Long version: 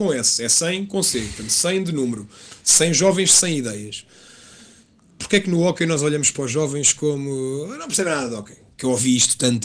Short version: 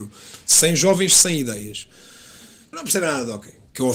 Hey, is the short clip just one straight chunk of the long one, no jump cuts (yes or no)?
no